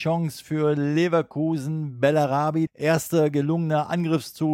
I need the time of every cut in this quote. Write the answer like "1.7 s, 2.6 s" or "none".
2.7 s